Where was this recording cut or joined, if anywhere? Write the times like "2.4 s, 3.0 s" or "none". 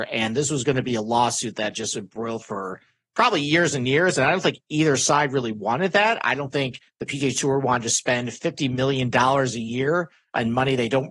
none